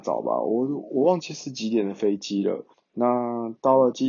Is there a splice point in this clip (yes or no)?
yes